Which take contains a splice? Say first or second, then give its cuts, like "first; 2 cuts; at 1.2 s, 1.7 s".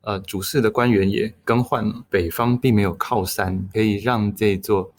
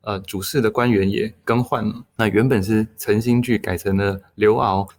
first; 1 cut; at 2.1 s